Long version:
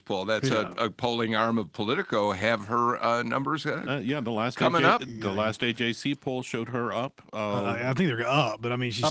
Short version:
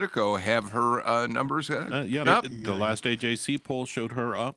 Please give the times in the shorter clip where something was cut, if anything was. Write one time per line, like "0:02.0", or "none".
0:02.2